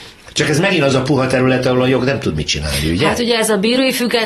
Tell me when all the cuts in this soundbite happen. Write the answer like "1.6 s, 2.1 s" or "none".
none